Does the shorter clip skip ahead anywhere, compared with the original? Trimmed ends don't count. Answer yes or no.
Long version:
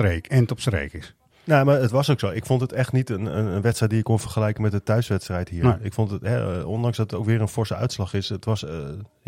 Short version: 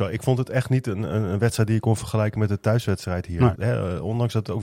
yes